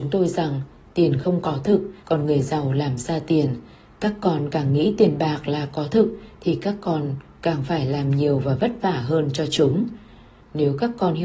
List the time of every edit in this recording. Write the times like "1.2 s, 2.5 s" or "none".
2.0 s